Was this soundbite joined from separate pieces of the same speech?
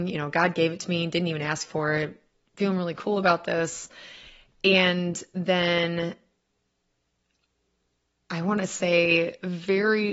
no; 0 cuts

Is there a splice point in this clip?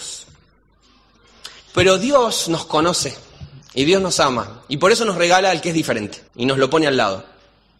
yes; 2 cuts; at 1.6 s, 6.3 s

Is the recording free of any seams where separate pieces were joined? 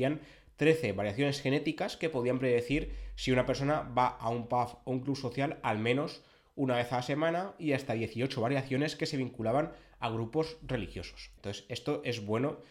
no; 1 cut; at 11.4 s

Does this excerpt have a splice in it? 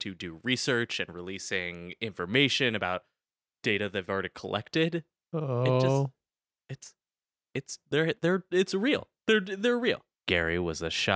yes; 1 cut; at 10.2 s

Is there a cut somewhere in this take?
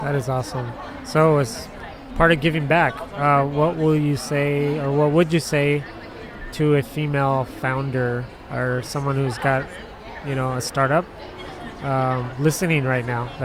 no; 0 cuts

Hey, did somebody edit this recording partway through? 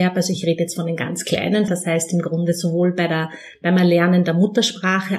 yes; 1 cut; at 1.7 s

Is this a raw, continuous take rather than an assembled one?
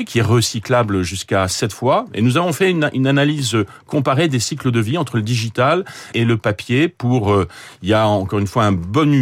no; 1 cut; at 6.1 s

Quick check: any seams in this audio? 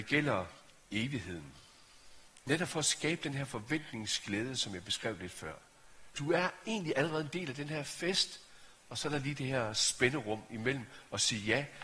yes; 1 cut; at 6.1 s

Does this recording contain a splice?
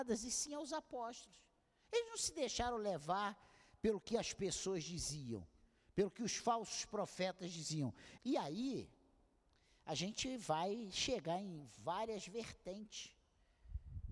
yes; 1 cut; at 8.2 s

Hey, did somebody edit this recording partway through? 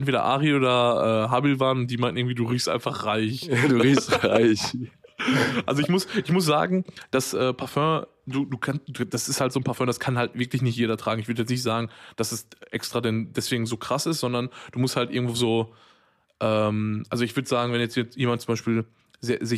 no; 0 cuts

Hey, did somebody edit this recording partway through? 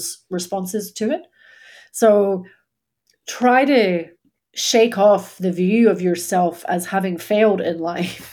no; 0 cuts

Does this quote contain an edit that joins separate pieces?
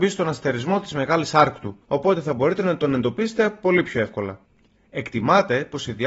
no; 0 cuts

